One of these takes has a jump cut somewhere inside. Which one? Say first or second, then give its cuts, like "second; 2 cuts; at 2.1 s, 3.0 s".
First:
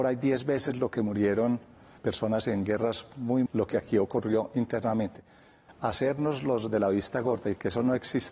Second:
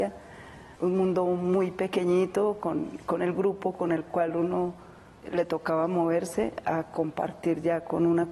first; 1 cut; at 3.5 s